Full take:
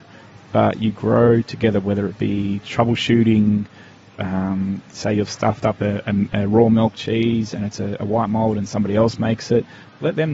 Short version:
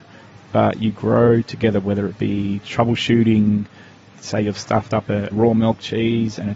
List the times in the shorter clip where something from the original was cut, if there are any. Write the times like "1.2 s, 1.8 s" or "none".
4.1 s, 5.3 s

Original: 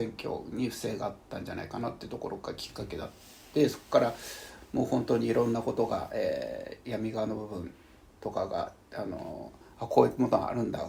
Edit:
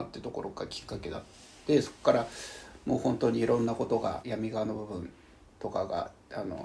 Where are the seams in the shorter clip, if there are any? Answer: 4.2 s

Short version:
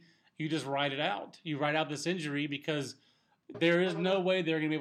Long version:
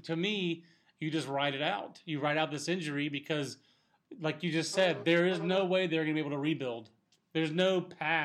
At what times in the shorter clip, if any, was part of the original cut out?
3.5 s

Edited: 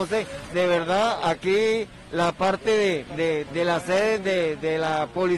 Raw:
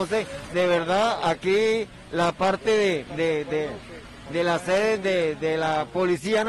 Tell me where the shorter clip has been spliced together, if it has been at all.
3.4 s

